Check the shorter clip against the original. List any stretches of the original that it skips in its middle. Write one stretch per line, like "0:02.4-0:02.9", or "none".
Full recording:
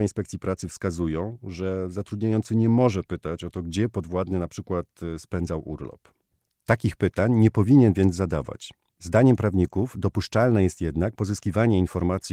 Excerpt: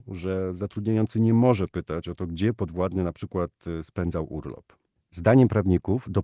0:06.4-0:08.9